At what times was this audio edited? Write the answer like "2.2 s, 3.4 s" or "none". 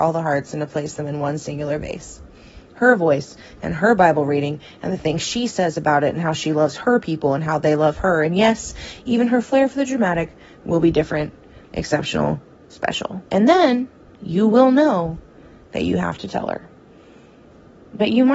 13.3 s